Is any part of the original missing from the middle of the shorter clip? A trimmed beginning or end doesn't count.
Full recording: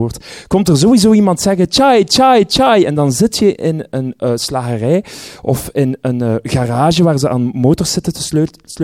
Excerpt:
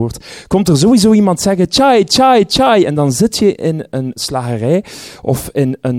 yes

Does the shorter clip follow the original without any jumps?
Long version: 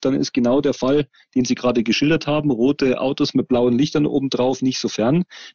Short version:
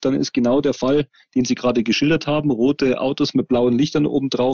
yes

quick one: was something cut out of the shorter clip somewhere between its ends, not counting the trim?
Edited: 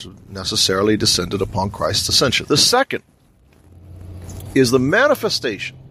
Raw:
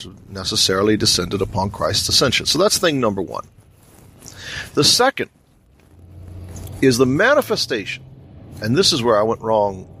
yes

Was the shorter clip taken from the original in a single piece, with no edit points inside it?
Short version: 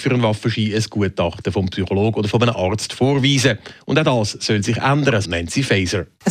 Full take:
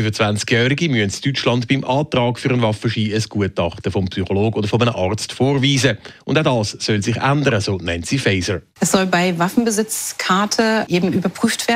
no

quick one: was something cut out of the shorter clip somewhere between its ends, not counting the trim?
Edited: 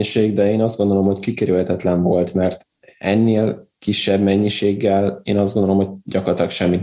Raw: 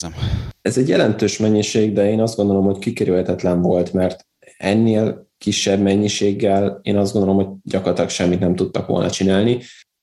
no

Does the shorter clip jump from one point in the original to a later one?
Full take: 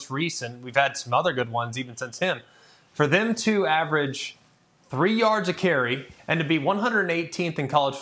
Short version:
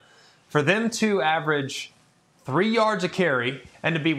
no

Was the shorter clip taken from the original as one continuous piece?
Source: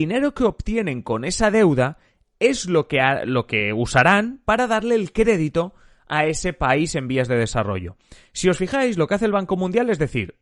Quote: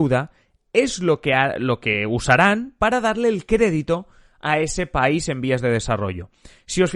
yes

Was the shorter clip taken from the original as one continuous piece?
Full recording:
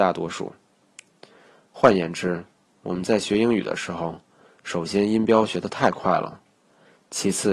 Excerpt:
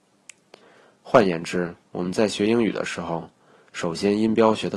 no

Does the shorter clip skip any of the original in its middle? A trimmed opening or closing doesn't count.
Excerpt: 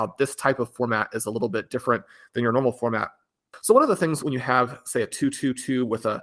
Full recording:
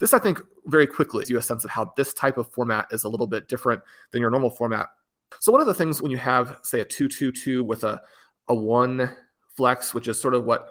no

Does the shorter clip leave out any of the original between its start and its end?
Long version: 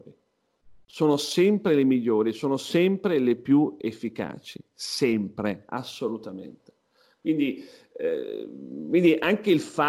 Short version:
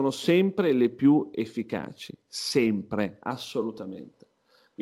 no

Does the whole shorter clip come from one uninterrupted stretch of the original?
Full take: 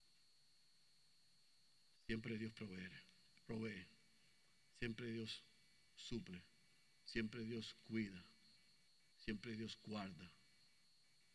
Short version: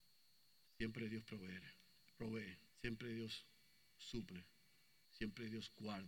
no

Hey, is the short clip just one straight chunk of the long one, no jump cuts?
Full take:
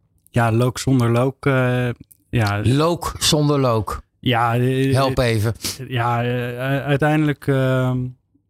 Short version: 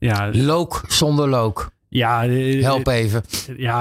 yes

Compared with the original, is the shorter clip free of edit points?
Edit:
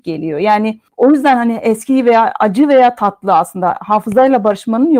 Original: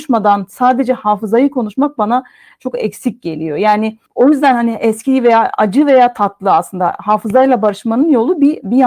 yes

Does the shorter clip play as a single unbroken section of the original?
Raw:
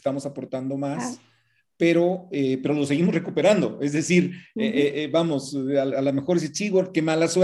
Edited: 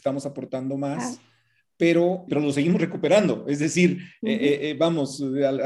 no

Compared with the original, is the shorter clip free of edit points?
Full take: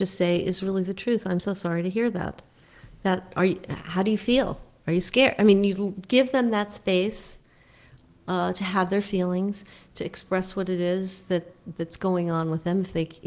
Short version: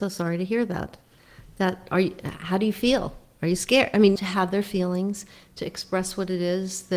no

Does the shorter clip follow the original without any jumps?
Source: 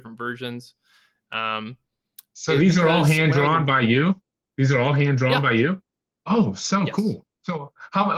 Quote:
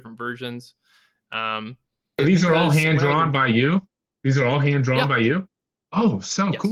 no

